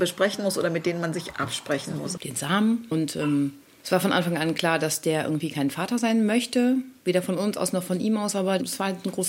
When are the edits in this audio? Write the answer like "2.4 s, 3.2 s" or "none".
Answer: 2.2 s